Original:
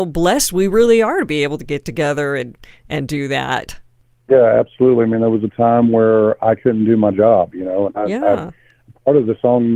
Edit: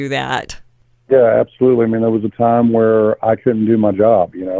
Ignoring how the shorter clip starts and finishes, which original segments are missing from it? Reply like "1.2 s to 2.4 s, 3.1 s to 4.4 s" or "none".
none